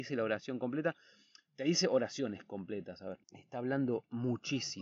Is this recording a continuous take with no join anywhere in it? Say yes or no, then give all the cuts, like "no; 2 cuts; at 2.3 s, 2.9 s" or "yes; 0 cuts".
no; 1 cut; at 3.2 s